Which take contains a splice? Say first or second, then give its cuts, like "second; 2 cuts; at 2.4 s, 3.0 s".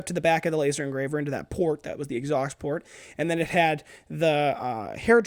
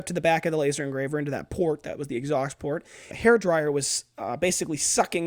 second; 1 cut; at 3.1 s